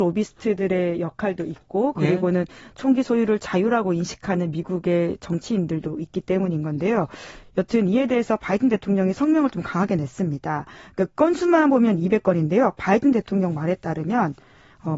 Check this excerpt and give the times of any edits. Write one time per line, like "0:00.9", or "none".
none

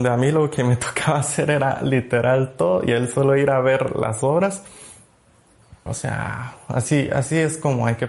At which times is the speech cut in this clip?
0:05.9

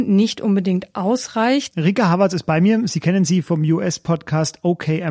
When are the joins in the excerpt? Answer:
0:01.7

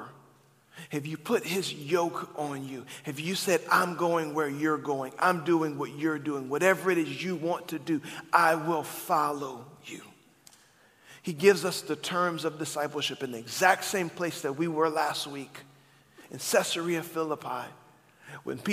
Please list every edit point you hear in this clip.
none

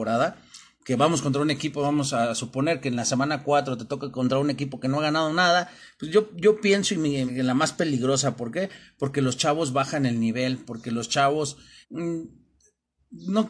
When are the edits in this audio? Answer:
0:07.3
0:11.8

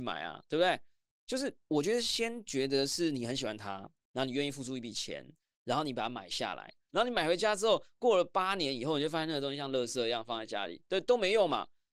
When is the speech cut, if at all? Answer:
0:06.9

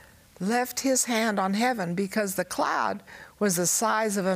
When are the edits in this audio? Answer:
none

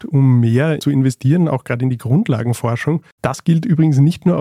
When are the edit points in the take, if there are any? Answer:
0:03.1

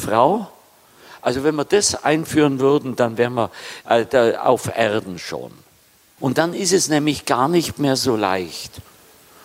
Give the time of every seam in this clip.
0:03.8
0:06.2

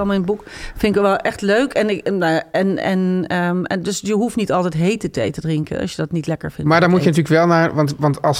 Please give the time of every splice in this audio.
none

